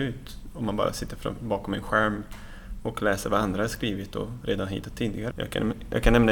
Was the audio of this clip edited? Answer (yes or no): yes